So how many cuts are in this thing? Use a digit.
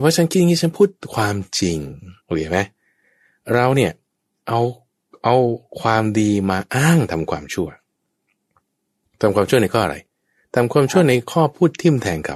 1